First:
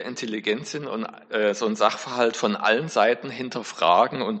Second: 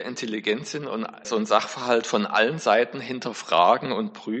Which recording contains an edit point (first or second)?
second